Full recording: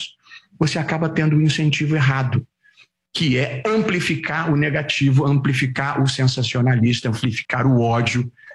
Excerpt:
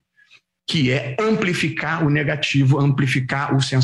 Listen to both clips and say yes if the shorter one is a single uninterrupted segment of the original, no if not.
yes